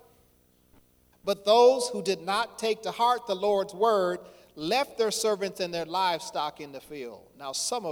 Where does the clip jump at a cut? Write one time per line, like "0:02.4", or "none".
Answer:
0:01.1